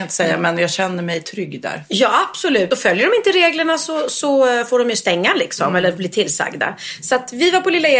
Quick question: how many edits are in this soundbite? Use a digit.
0